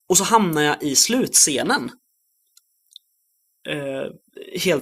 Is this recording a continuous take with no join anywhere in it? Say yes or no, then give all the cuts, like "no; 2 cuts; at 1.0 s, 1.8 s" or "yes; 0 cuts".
yes; 0 cuts